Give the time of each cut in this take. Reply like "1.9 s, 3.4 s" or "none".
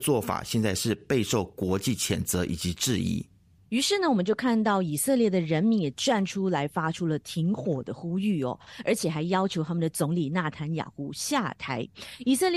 none